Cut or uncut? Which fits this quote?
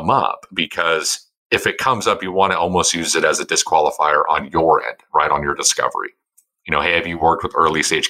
uncut